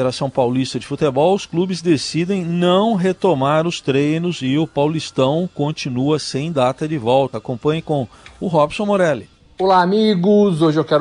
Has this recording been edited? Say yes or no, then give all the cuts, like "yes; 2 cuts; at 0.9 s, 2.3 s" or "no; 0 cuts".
no; 0 cuts